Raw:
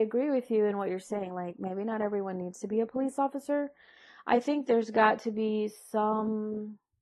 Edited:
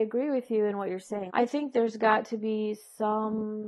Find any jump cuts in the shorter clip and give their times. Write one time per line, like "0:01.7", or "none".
0:01.3